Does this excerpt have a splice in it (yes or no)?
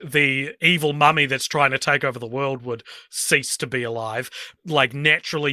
yes